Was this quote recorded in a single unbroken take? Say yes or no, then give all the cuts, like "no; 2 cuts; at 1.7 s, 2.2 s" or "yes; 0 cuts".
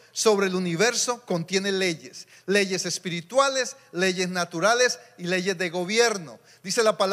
yes; 0 cuts